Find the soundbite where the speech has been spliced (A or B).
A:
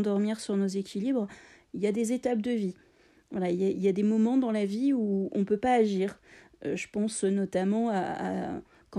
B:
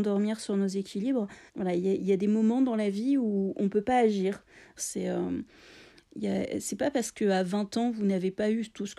B